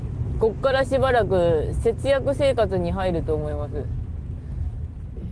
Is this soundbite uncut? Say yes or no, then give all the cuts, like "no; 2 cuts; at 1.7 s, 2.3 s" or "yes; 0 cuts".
yes; 0 cuts